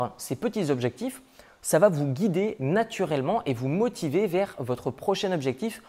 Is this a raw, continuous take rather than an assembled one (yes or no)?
yes